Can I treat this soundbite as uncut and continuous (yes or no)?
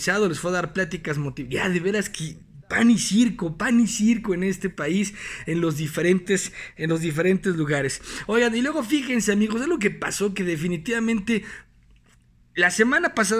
yes